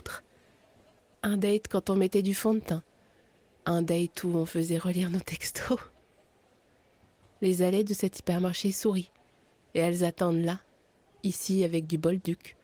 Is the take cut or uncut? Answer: uncut